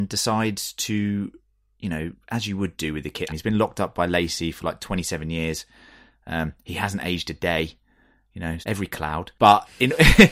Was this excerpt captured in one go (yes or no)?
no